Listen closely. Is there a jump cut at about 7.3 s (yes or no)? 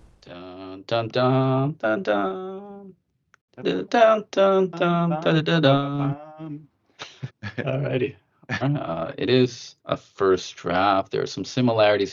yes